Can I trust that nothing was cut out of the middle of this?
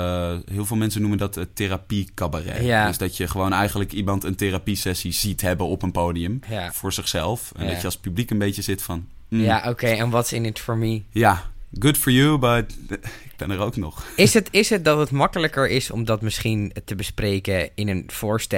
yes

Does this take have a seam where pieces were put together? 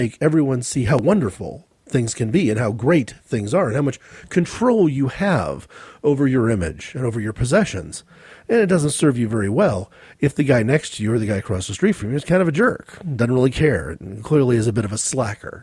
no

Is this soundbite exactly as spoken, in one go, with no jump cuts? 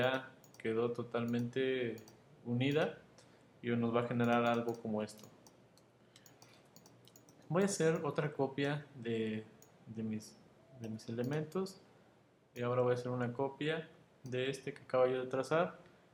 yes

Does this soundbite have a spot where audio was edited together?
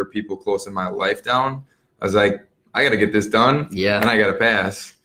no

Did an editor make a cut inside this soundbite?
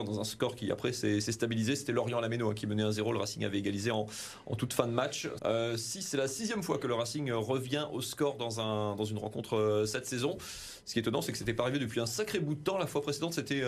yes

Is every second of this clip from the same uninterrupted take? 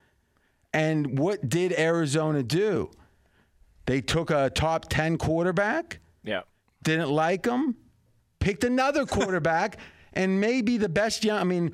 no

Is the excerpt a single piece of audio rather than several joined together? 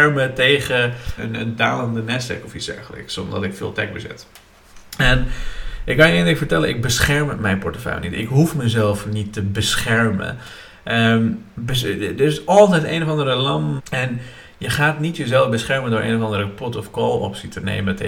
no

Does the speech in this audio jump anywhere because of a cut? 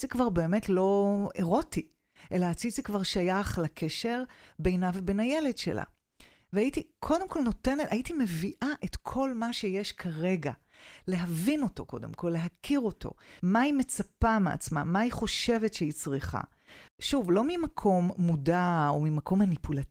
yes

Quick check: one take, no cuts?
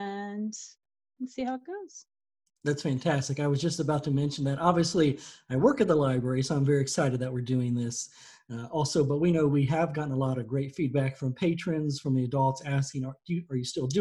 yes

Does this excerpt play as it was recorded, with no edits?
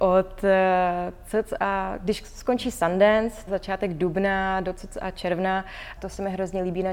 no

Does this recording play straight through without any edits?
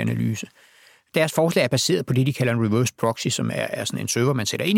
yes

